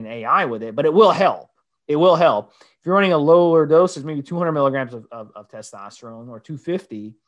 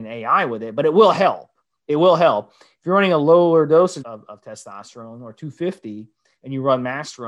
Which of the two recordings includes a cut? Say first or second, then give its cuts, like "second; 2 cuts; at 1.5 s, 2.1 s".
second; 1 cut; at 4.0 s